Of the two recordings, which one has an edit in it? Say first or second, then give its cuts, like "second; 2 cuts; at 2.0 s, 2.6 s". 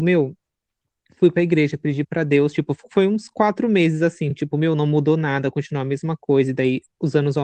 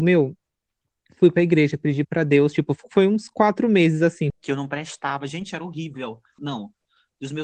second; 2 cuts; at 4.3 s, 6.4 s